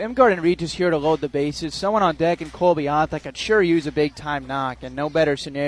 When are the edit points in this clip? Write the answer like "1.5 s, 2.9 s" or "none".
none